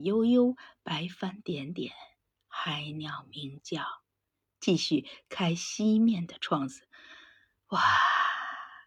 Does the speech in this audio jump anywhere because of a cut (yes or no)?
yes